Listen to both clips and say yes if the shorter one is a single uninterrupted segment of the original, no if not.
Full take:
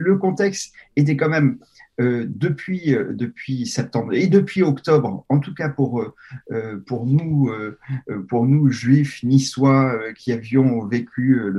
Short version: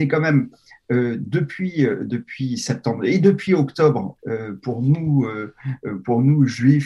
no